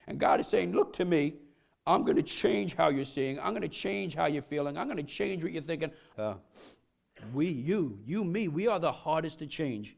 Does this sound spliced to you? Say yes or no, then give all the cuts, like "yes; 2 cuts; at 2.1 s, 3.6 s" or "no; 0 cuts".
yes; 1 cut; at 6.1 s